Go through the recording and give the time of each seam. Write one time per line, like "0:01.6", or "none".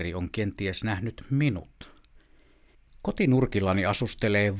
0:02.9